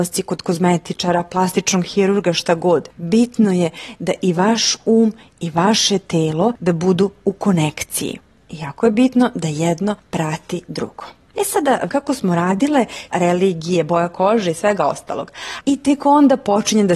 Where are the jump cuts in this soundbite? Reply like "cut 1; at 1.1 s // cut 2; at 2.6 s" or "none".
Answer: cut 1; at 11.9 s // cut 2; at 13.1 s // cut 3; at 15.6 s